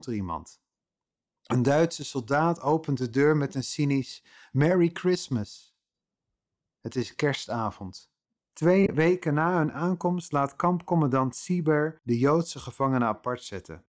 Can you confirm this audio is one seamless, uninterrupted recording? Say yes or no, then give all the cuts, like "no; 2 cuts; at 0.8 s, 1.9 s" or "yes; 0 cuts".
no; 1 cut; at 8.4 s